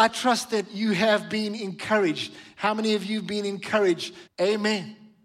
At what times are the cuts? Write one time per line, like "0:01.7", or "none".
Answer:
0:04.3